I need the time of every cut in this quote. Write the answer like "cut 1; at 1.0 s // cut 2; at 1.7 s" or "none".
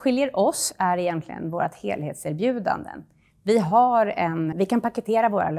cut 1; at 4.5 s